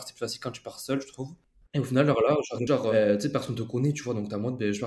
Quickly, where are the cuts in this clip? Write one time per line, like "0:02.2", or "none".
0:01.6
0:02.7